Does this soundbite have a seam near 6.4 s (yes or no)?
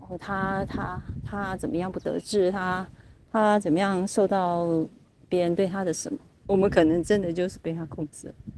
yes